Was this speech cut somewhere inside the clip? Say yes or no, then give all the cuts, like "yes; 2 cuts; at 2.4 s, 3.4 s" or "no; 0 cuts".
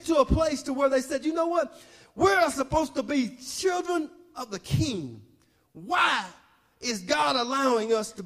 no; 0 cuts